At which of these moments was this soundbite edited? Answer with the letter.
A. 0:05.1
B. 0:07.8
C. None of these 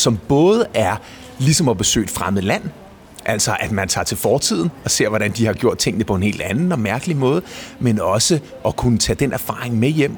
C